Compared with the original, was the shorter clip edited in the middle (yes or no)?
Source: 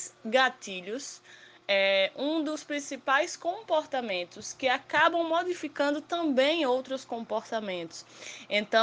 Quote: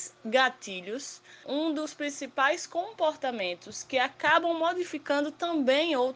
yes